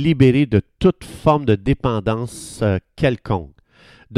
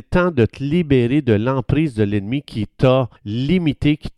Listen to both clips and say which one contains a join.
second; 1 cut; at 3.2 s

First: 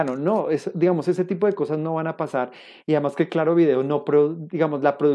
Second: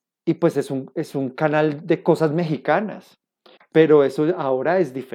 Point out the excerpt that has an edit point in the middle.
second; 1 cut; at 3.6 s

